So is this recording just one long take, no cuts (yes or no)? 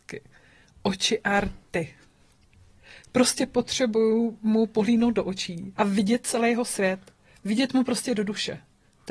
no